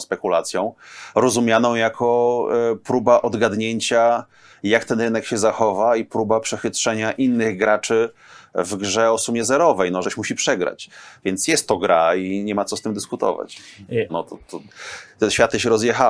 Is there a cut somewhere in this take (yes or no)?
yes